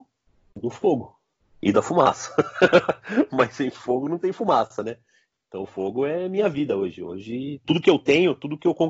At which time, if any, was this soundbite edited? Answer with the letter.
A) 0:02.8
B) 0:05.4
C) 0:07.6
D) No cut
C